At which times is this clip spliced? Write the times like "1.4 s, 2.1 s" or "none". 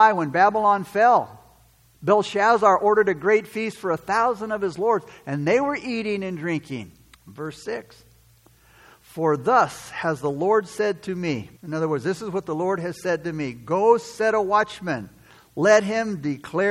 7.1 s, 11.6 s